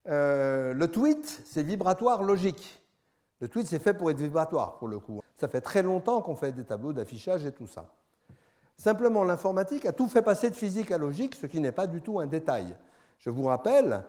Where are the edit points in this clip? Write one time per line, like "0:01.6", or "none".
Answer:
0:05.2